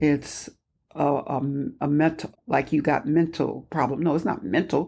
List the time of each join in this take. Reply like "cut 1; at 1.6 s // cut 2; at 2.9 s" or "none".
cut 1; at 2.3 s